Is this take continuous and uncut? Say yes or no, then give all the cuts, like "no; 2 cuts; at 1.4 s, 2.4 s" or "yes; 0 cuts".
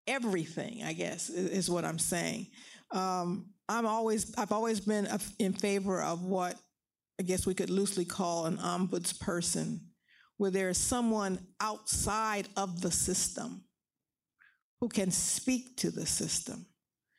yes; 0 cuts